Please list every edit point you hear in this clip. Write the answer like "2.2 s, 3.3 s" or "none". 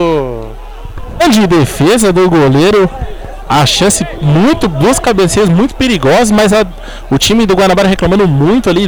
none